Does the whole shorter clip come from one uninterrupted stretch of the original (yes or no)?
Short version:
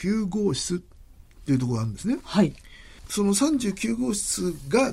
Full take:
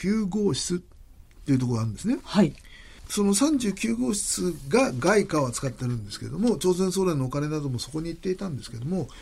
yes